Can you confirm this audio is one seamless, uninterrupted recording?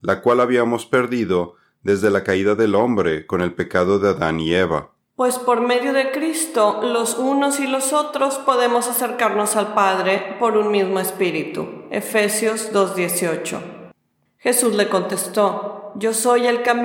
yes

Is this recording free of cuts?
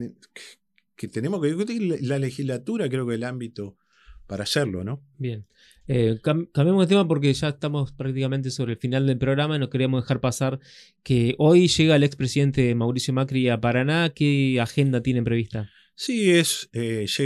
yes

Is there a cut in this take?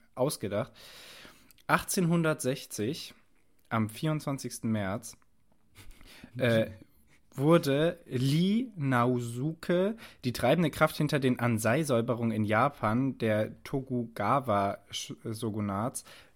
no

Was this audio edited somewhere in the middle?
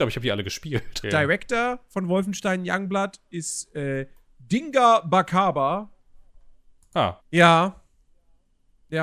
yes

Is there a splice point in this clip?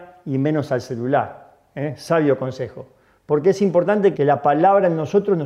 yes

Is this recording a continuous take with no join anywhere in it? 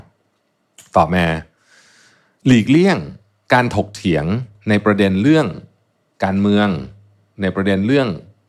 yes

